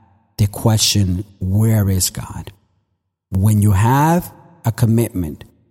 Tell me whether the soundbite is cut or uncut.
uncut